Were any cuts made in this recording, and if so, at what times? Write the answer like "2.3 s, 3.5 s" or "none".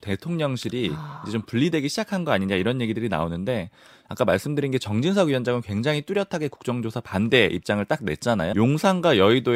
8.5 s